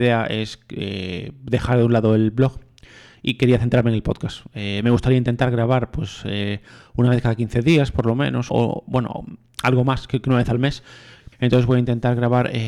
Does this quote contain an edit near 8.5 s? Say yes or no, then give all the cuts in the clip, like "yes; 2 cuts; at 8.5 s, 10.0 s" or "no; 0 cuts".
yes; 2 cuts; at 8.5 s, 11.3 s